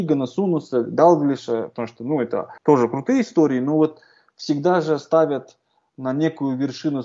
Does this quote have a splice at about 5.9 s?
no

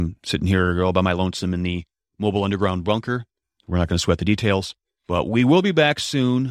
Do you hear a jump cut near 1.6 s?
no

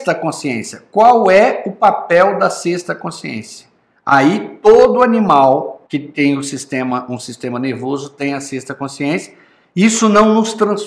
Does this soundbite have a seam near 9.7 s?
no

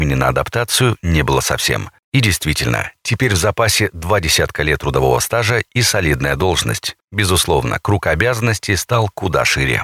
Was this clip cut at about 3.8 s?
no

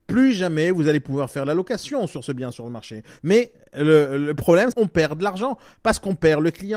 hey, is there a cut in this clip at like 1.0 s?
no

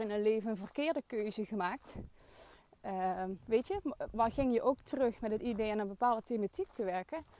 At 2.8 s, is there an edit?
no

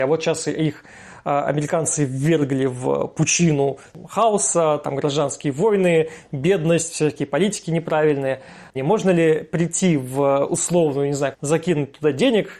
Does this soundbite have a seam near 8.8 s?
yes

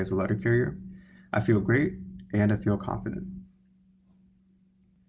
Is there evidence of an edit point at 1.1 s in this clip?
no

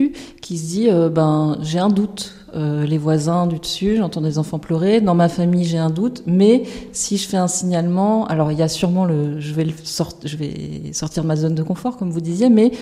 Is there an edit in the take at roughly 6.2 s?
no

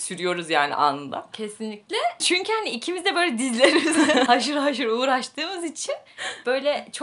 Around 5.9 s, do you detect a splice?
no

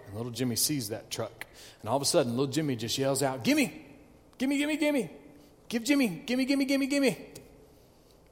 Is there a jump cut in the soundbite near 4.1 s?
no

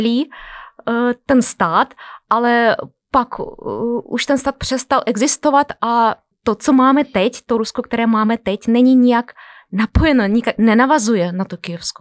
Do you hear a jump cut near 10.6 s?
yes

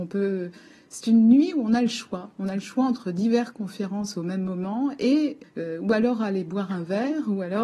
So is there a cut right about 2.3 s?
no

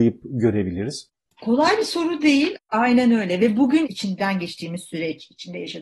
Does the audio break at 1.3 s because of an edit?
no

